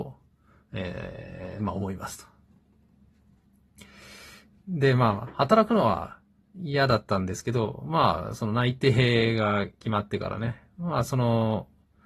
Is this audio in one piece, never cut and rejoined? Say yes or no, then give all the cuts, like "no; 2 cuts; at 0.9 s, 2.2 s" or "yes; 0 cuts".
yes; 0 cuts